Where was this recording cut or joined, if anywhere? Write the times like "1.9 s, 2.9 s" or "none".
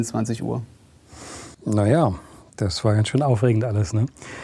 1.5 s